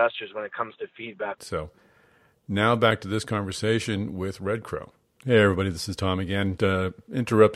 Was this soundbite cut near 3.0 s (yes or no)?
no